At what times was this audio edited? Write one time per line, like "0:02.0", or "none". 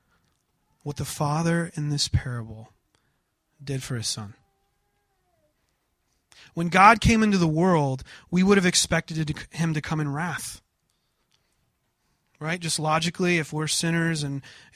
none